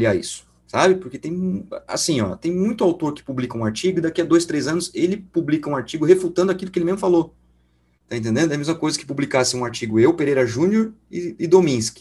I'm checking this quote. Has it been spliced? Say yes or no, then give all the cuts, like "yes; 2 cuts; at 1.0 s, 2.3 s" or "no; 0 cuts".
yes; 1 cut; at 8.0 s